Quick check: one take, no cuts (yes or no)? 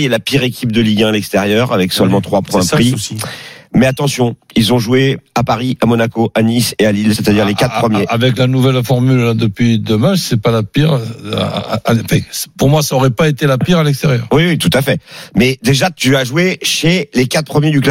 yes